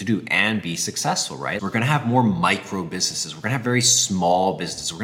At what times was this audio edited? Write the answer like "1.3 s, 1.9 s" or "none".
1.6 s

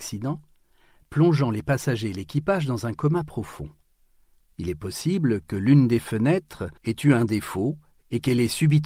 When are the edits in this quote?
1.0 s, 4.4 s, 6.8 s

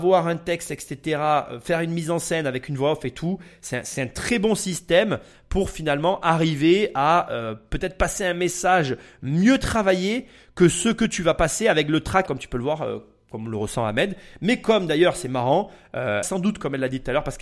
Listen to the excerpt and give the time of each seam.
12.3 s, 16.2 s

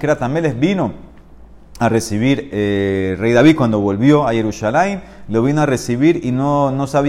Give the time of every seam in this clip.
2.5 s

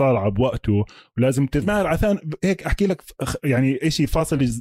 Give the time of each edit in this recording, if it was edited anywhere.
1.6 s

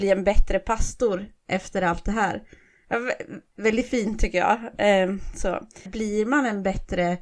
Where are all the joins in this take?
5.9 s

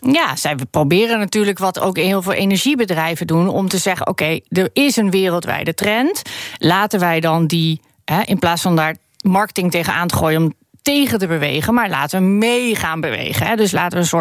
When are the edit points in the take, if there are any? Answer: none

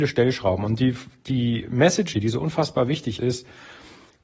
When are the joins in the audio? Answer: 2.1 s, 3.2 s

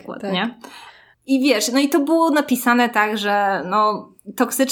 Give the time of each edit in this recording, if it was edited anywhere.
1.1 s

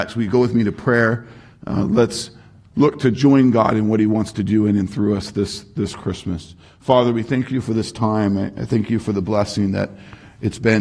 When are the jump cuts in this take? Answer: none

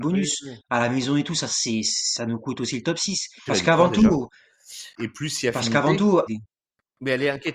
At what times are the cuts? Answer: 3.5 s, 5.0 s, 6.3 s

